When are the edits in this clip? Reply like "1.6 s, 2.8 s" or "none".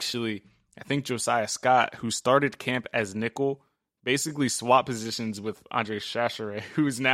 none